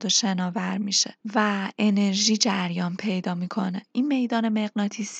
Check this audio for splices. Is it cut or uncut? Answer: cut